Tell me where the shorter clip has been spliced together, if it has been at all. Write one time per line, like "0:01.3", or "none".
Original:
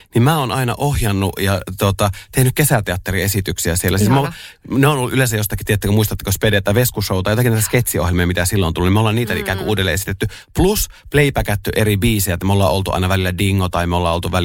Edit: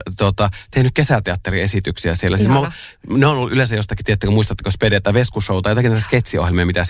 none